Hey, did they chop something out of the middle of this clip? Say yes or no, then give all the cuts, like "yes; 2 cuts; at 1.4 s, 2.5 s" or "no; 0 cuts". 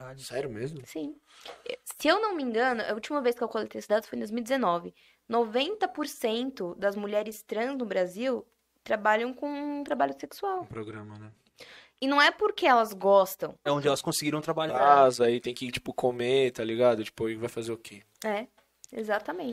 yes; 3 cuts; at 13.7 s, 14.7 s, 18.2 s